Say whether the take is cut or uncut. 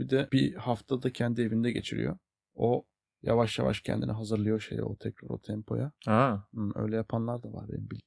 uncut